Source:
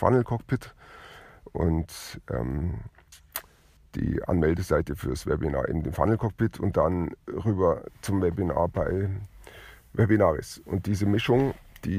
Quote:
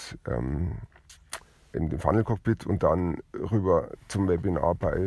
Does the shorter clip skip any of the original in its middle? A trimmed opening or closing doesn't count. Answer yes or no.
yes